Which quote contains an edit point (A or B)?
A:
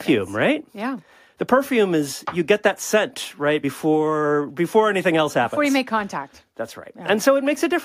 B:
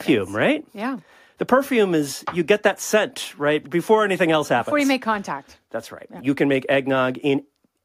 B